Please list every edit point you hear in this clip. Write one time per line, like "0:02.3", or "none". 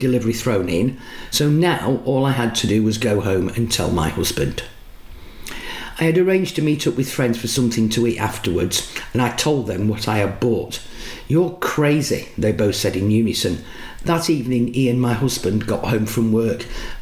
0:14.0